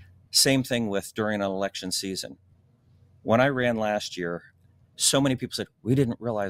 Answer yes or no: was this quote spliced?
no